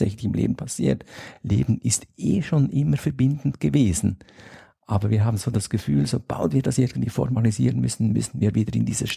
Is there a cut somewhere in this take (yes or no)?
no